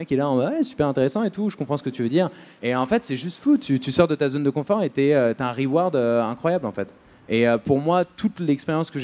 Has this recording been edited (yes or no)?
no